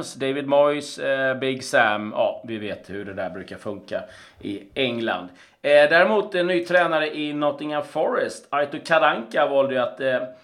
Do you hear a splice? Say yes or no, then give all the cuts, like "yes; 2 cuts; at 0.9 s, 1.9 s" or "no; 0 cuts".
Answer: no; 0 cuts